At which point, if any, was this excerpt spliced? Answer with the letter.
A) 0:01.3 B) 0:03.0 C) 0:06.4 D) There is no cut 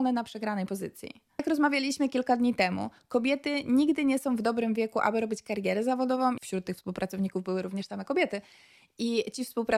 C